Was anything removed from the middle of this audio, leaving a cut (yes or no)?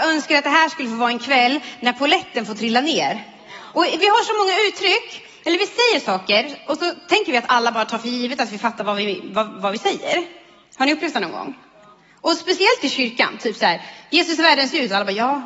no